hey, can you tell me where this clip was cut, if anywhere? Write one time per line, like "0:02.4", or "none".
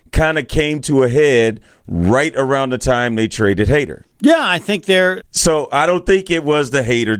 0:04.1
0:05.2